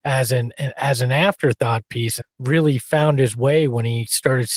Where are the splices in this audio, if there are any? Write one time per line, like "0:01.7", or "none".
0:02.2